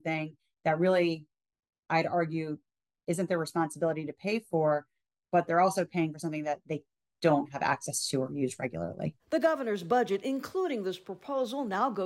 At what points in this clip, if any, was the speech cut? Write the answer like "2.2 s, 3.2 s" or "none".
none